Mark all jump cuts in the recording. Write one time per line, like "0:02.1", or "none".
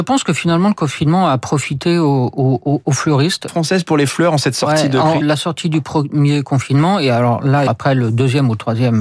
0:03.5
0:05.2
0:07.7